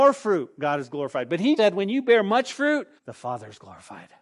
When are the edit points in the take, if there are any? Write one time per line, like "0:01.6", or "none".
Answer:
0:01.6
0:03.0